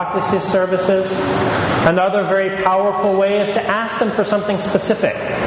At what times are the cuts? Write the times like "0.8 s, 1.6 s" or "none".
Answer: none